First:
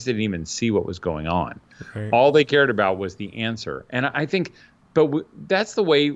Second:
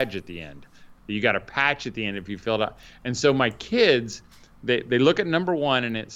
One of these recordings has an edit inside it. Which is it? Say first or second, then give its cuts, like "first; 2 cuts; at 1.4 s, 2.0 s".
second; 1 cut; at 1.0 s